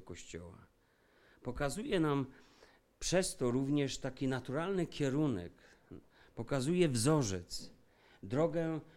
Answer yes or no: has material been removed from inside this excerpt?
no